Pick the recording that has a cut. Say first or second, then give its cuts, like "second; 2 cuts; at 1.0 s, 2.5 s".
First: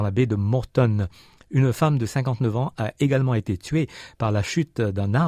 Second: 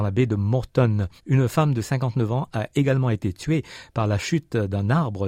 second; 1 cut; at 1.2 s